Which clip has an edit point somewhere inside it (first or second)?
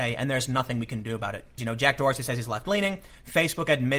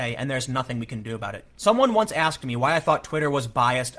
first